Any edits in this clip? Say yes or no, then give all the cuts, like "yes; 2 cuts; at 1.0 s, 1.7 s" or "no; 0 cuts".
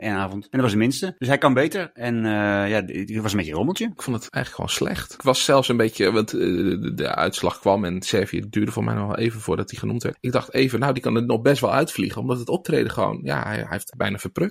no; 0 cuts